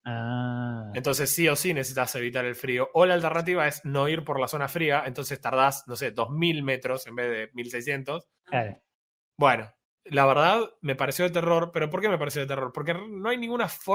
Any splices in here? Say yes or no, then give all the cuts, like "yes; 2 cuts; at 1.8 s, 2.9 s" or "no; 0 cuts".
no; 0 cuts